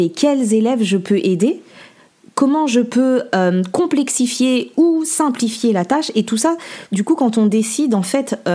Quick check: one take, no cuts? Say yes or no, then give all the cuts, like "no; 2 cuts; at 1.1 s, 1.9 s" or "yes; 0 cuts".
yes; 0 cuts